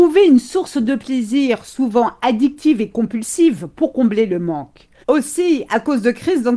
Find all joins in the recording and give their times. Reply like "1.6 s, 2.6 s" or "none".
5.0 s

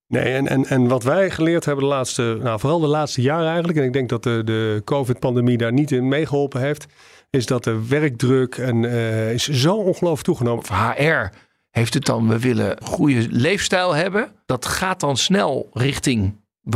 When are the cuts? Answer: 10.6 s, 14.5 s

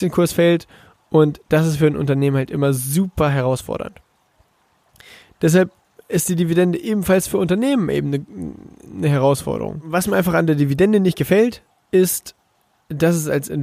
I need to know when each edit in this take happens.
none

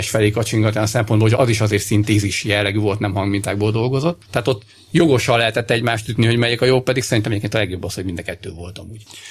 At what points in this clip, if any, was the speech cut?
1.4 s

